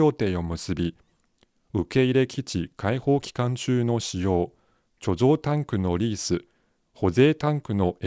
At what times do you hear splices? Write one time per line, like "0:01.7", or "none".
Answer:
none

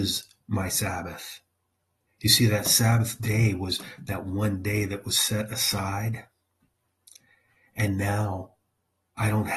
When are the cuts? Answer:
0:02.1

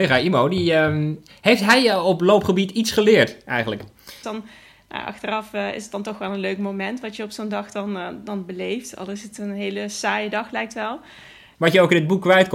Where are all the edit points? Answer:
0:04.2
0:11.5

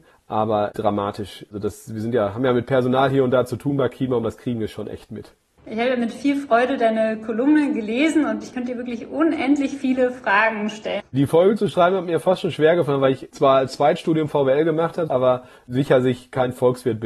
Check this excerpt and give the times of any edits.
0:11.0
0:15.1

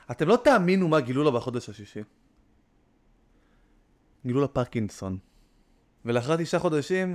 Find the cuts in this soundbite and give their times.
0:06.0

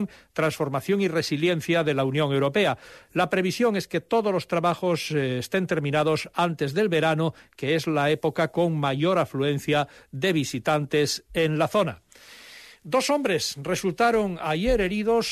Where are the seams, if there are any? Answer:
none

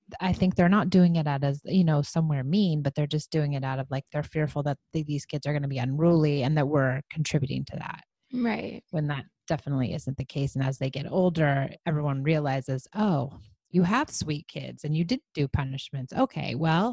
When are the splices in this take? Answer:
none

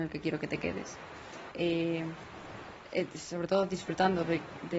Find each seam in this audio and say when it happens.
0:01.5

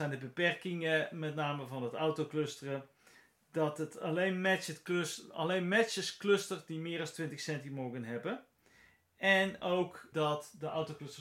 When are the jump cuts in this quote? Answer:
0:10.1

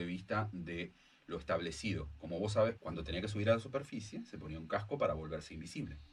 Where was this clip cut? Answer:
0:02.7

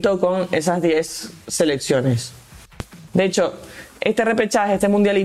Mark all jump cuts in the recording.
0:03.1

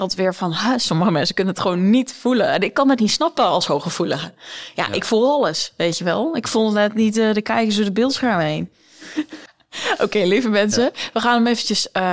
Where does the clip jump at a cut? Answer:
none

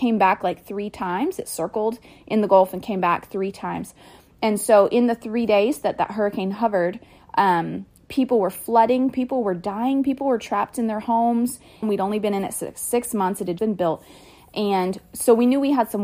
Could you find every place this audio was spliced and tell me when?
0:11.8
0:13.6

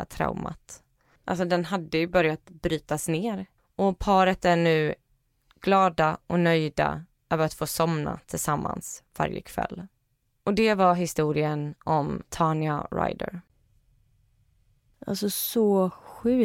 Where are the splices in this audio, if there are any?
0:01.2
0:03.6

